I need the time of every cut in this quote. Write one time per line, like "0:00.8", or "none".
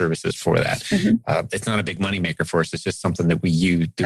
none

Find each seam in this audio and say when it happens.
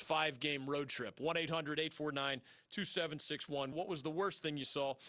0:03.7

